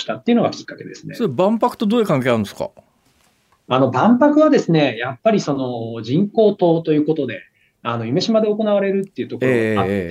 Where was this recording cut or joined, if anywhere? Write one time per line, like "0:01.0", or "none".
none

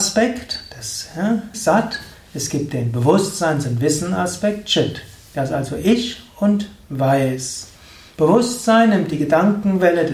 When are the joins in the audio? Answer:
0:01.5
0:08.1

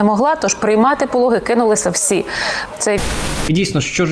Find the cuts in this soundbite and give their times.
0:02.7

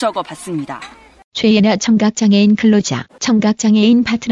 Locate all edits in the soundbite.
0:03.1

